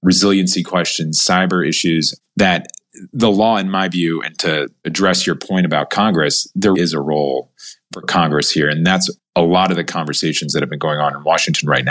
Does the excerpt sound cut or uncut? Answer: cut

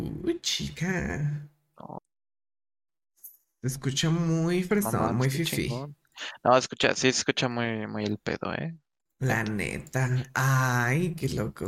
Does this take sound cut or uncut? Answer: uncut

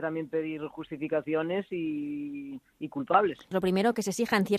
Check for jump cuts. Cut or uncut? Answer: cut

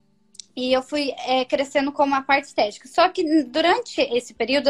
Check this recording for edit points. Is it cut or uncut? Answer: uncut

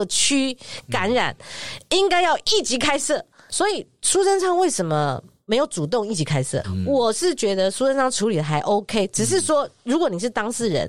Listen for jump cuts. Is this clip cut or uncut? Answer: cut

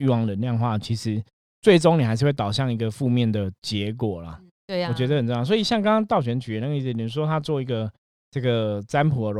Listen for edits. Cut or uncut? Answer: uncut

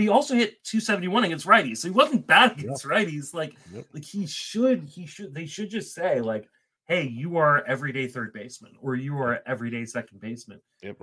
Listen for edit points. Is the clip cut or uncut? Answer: uncut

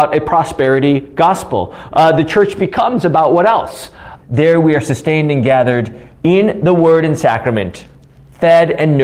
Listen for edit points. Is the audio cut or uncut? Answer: cut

